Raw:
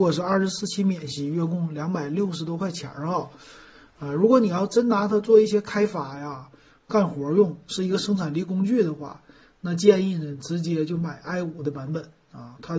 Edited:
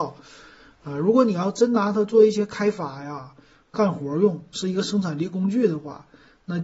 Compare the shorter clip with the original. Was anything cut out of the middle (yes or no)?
no